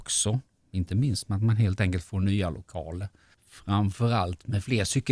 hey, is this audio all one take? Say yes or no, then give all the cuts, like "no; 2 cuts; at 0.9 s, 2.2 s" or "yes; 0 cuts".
no; 1 cut; at 3.3 s